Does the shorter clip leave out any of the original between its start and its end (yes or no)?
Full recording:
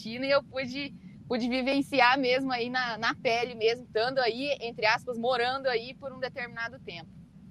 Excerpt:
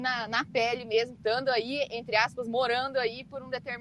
no